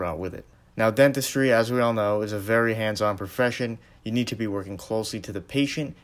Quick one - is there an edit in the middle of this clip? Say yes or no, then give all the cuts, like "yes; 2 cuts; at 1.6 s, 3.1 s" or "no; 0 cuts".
no; 0 cuts